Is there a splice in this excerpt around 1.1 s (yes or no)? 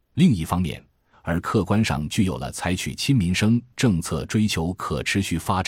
yes